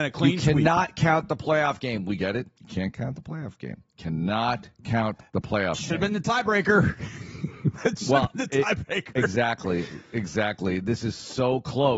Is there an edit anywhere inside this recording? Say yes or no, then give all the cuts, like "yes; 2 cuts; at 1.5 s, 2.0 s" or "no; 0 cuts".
no; 0 cuts